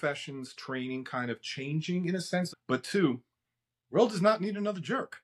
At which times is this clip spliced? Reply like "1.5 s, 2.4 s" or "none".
2.5 s